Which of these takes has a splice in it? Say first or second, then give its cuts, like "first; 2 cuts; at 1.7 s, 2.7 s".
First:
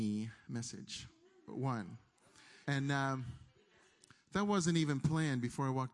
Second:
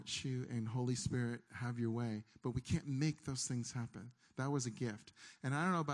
first; 1 cut; at 2.6 s